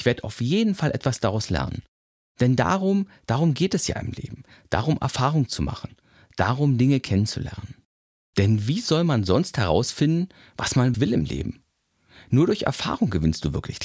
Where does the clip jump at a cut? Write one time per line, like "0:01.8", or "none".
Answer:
0:10.9